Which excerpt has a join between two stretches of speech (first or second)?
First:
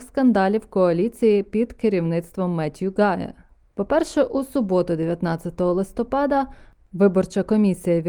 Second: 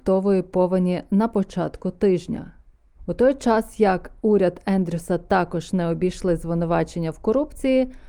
second